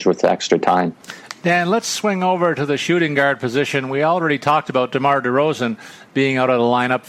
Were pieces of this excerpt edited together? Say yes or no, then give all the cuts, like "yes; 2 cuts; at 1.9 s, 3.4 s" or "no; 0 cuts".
no; 0 cuts